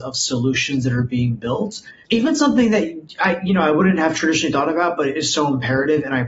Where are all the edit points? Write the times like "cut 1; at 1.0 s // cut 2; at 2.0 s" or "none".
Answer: none